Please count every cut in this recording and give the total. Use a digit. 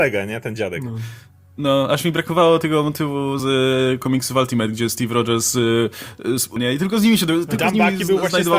2